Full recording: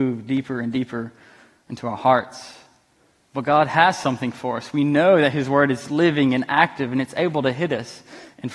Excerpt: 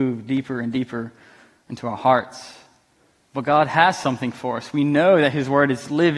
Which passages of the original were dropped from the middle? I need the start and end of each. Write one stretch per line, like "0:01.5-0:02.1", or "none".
none